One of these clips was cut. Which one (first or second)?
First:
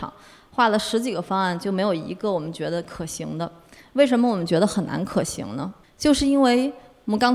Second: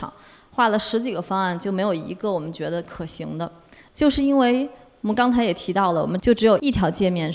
second